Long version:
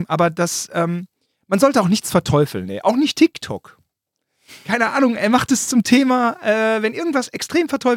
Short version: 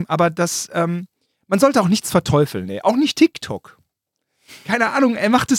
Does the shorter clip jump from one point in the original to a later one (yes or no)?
no